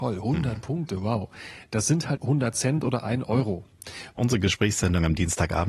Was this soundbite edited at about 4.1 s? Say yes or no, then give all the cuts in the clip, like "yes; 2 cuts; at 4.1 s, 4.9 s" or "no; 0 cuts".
yes; 2 cuts; at 2.2 s, 4.1 s